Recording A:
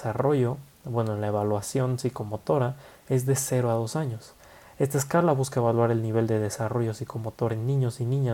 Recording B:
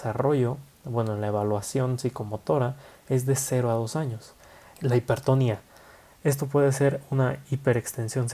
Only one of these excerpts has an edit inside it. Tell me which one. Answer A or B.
B